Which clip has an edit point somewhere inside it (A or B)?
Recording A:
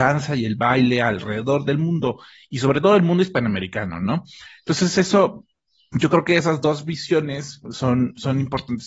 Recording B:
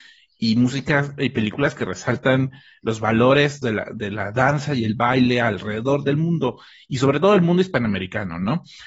B